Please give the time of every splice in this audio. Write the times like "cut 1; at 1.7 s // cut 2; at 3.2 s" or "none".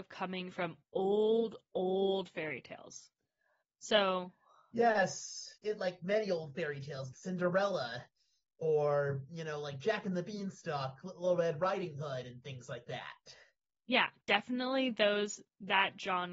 cut 1; at 7.1 s

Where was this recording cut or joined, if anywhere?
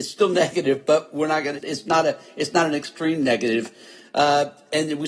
cut 1; at 1.6 s

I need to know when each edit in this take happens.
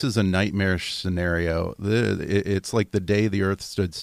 none

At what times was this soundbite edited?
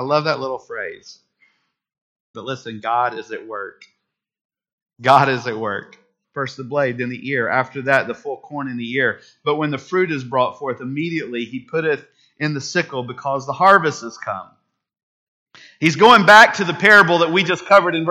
cut 1; at 2.3 s // cut 2; at 6.2 s

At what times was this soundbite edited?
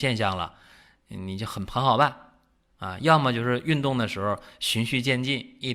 none

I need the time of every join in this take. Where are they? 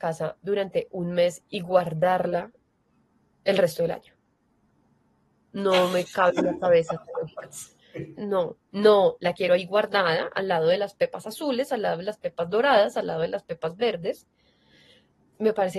cut 1; at 8.2 s

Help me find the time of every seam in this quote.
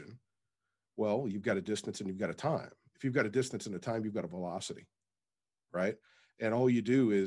none

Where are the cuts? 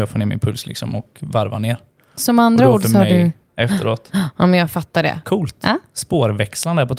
cut 1; at 3.5 s // cut 2; at 5.2 s

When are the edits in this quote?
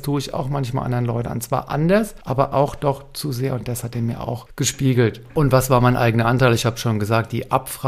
none

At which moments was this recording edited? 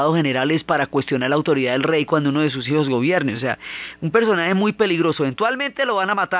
none

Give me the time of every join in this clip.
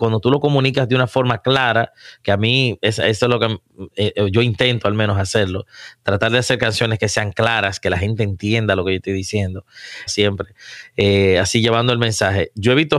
cut 1; at 10.1 s

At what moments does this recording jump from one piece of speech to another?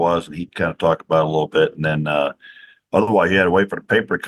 none

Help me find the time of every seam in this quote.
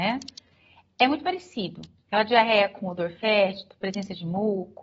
none

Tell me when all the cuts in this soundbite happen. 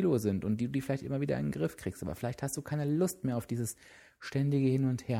none

